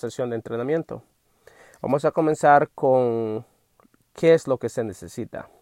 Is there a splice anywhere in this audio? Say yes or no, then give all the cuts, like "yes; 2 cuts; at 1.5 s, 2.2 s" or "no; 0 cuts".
no; 0 cuts